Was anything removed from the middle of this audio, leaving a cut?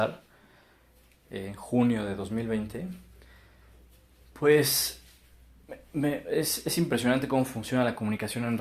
no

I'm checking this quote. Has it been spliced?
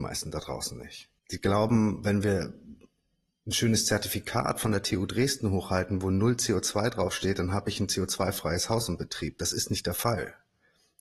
yes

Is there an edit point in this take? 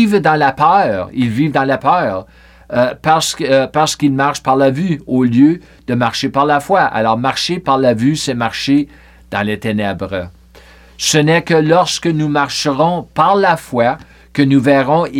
no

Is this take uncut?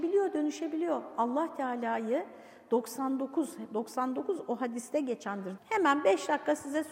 no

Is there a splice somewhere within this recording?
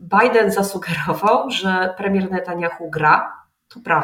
no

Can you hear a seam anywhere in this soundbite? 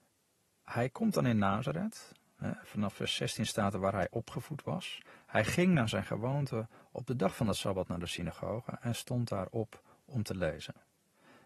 no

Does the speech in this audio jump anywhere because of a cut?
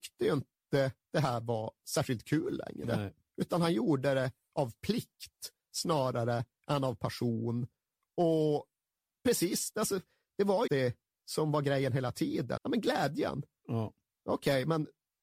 yes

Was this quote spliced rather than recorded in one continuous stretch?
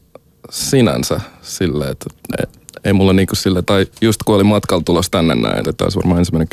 yes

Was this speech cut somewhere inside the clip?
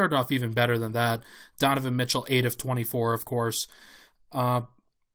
no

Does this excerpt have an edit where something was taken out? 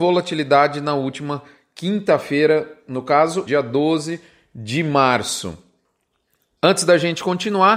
yes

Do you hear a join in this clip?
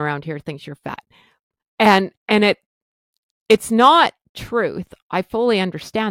no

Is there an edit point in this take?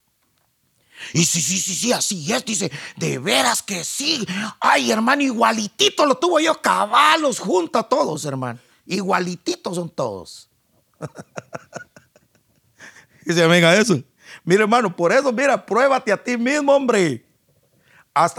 no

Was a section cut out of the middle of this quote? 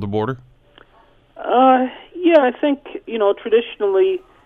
yes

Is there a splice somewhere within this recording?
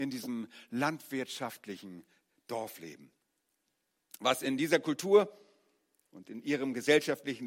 no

